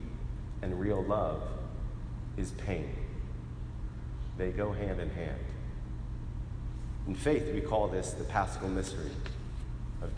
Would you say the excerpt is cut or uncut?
uncut